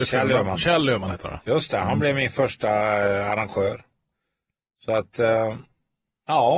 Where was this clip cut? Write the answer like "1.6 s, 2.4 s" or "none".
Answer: none